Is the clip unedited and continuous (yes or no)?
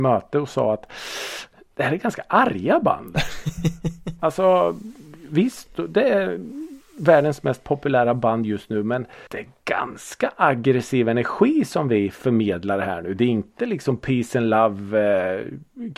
no